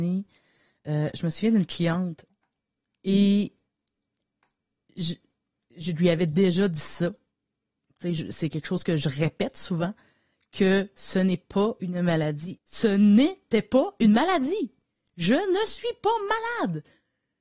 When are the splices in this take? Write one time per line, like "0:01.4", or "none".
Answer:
0:12.6